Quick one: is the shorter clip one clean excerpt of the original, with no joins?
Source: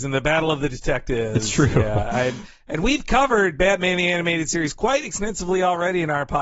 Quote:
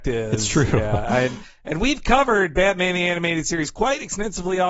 yes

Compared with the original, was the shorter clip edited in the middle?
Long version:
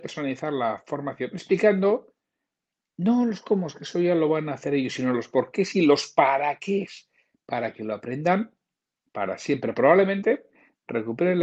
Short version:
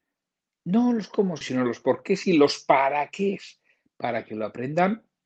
yes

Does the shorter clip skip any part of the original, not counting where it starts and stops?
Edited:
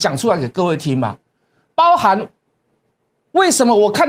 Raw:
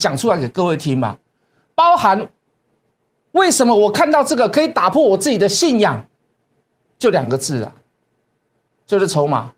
no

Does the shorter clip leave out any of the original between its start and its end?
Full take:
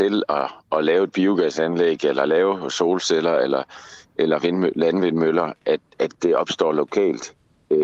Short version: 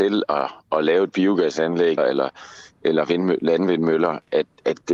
yes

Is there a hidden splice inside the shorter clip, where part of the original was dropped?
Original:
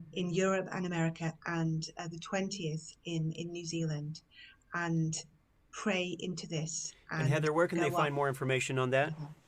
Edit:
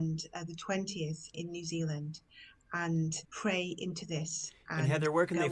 yes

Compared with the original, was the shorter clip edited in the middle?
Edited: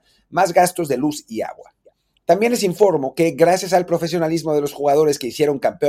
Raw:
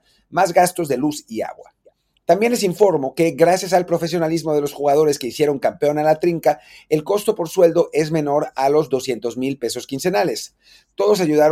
no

